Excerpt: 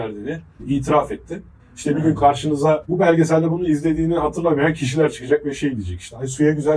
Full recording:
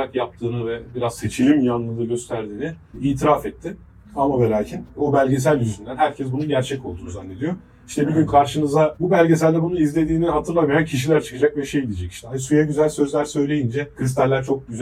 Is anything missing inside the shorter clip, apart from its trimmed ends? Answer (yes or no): yes